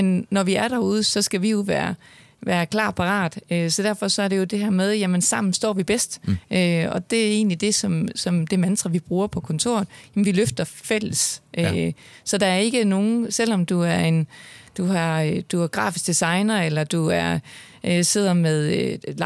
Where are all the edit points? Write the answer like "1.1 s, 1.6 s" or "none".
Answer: none